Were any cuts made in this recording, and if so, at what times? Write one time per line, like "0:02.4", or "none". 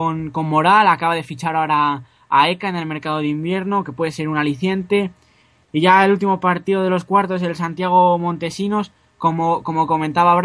none